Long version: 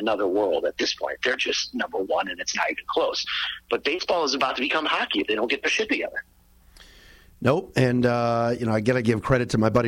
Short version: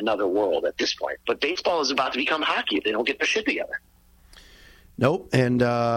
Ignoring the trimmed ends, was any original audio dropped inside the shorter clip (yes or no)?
yes